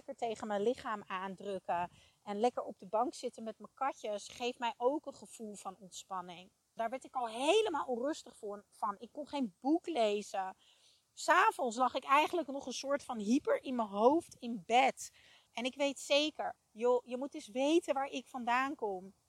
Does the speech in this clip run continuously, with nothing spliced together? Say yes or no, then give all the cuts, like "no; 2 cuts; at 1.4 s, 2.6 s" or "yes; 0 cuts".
no; 3 cuts; at 6.8 s, 15.5 s, 16.6 s